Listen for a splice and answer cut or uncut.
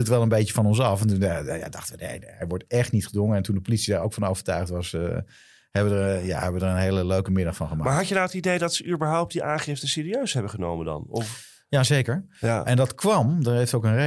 cut